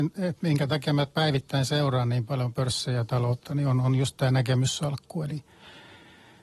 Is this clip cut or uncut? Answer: uncut